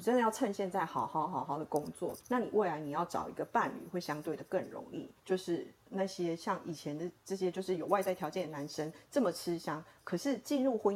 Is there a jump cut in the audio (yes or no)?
yes